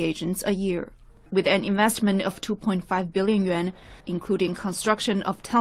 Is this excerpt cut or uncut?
cut